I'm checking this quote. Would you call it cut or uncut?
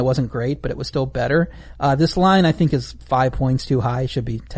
uncut